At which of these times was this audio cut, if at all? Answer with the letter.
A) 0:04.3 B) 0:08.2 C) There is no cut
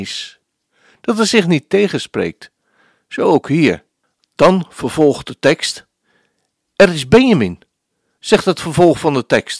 B